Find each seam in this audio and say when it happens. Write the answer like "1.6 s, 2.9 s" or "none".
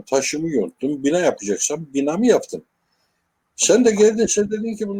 none